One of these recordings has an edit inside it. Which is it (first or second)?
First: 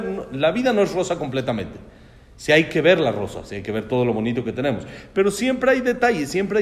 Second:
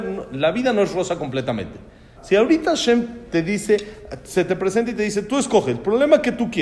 second